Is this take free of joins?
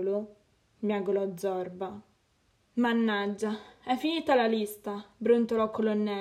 yes; 0 cuts

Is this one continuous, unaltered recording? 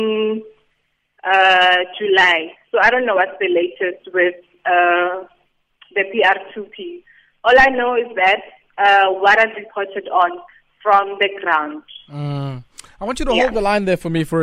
yes; 0 cuts

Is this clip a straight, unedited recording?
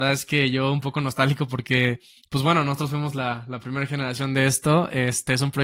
yes; 0 cuts

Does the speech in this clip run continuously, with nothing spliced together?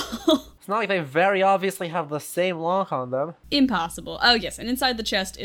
yes; 0 cuts

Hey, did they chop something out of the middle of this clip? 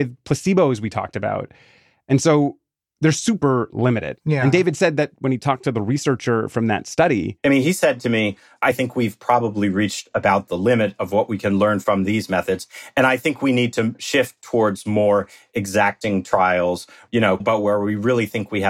yes; 1 cut; at 17.4 s

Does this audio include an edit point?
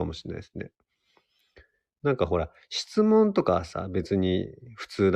no; 0 cuts

